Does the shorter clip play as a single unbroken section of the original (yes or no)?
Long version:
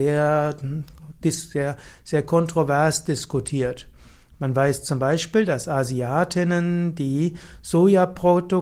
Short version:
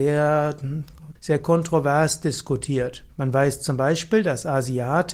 no